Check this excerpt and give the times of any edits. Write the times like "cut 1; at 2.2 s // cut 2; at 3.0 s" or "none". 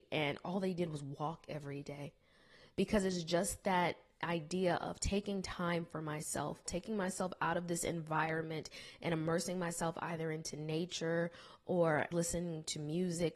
cut 1; at 6.7 s // cut 2; at 12.1 s